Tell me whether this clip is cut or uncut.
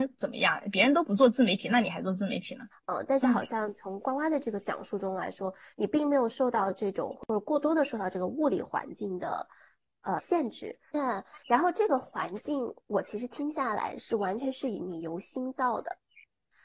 cut